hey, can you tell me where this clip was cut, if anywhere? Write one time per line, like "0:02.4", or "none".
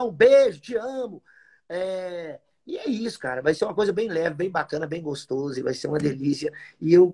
none